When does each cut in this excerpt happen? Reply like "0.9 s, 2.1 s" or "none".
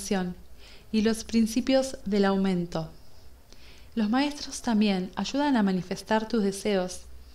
3.9 s